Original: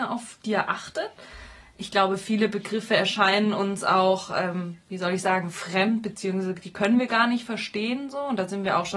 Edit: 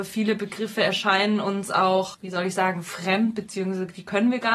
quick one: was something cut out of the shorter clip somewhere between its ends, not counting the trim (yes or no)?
yes